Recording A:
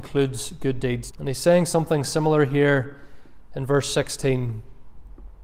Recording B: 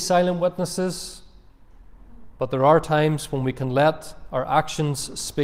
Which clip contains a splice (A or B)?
A